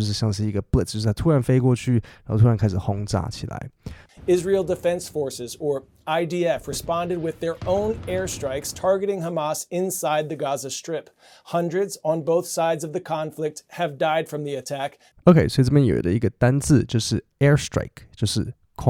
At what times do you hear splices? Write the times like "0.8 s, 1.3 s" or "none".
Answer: 4.1 s, 15.1 s